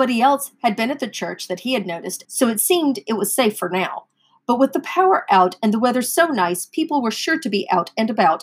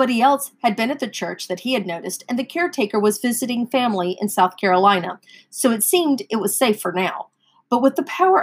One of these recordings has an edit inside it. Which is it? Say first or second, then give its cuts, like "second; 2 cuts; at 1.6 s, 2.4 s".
first; 1 cut; at 2.2 s